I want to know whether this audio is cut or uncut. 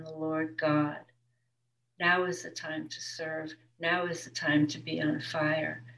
uncut